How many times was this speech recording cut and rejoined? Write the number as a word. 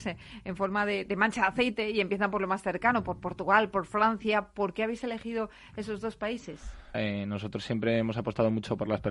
one